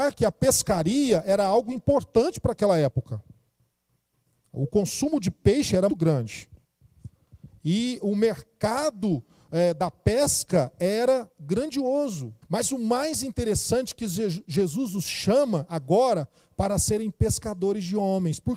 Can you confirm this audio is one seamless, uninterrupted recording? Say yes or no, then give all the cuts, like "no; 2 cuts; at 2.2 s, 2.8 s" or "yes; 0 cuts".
no; 2 cuts; at 5.9 s, 12.4 s